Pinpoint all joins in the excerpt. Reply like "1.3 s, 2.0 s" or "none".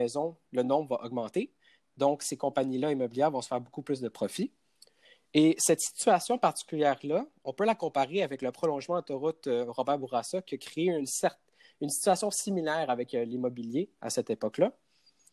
none